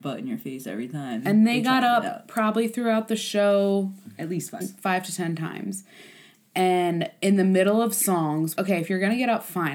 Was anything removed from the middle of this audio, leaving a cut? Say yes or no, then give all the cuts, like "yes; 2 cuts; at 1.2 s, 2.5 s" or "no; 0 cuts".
yes; 2 cuts; at 4.6 s, 8.6 s